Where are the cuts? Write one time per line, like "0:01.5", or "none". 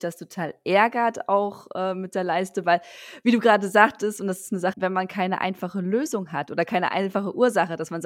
0:04.7